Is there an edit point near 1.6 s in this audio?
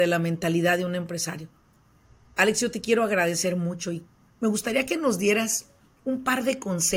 no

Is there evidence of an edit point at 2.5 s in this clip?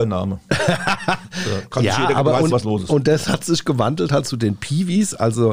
yes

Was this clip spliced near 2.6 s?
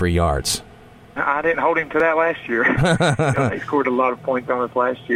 no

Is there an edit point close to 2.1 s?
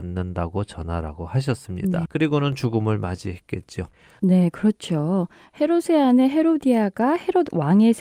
yes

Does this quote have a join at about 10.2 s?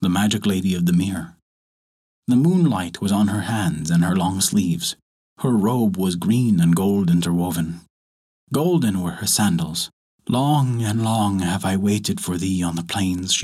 yes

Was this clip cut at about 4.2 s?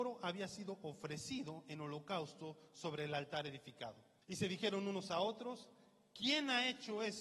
yes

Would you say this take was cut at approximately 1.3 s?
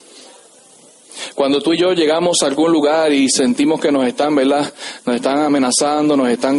no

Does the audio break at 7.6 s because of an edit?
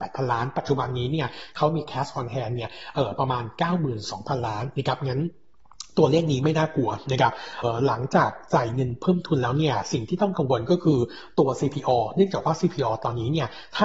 yes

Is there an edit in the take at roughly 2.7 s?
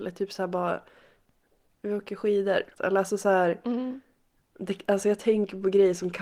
yes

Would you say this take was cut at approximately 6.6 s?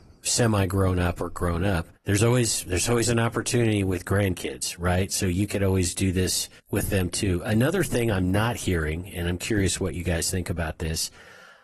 yes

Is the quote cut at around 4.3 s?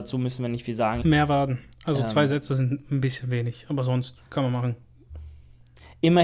yes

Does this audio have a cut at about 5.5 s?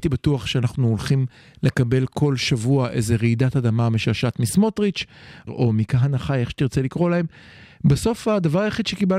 yes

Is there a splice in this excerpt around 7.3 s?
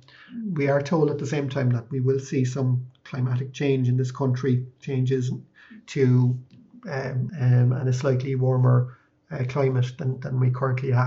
yes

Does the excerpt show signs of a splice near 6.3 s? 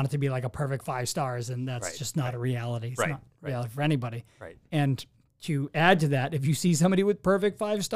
no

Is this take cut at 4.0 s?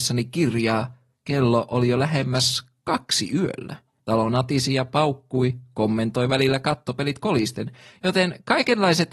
yes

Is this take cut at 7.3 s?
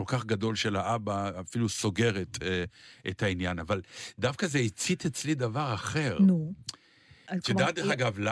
yes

